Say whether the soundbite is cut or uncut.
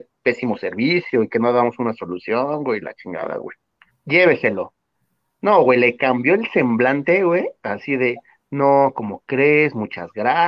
cut